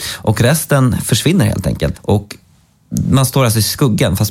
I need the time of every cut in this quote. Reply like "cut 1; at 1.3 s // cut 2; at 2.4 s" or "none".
cut 1; at 1.9 s